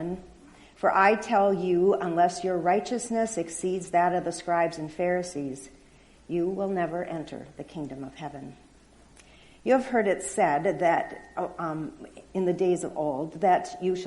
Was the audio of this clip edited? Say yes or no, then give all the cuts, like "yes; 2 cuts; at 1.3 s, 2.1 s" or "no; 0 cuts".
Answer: no; 0 cuts